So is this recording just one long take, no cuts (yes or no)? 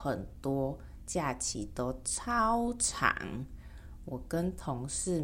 no